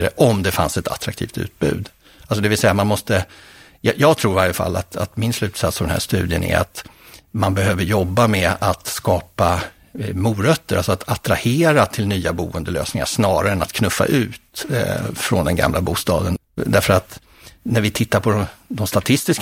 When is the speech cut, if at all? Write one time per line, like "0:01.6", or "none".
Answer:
0:16.4